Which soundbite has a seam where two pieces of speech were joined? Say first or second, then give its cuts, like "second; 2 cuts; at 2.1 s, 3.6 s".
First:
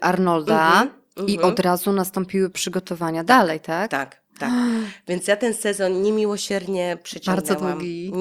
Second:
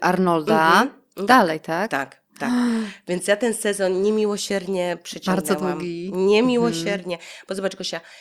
second; 1 cut; at 1.3 s